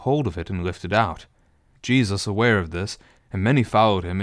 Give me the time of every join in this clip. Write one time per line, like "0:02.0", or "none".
0:01.7
0:03.2